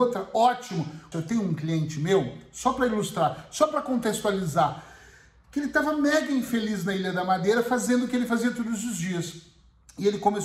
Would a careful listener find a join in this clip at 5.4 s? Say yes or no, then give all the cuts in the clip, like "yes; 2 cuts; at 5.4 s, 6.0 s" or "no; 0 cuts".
no; 1 cut; at 1.1 s